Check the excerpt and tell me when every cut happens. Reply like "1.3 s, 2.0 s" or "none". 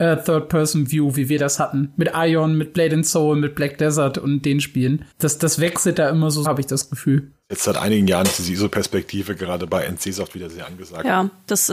5.1 s, 6.4 s